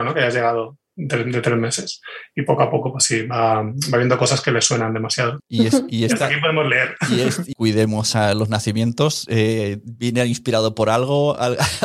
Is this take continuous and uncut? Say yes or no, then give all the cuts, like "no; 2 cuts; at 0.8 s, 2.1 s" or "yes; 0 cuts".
no; 2 cuts; at 5.4 s, 7.5 s